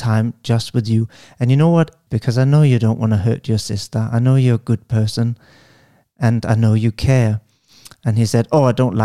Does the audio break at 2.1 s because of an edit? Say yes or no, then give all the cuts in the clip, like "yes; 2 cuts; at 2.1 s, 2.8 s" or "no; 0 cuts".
yes; 1 cut; at 2.1 s